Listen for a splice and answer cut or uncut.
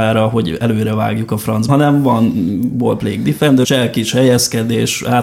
cut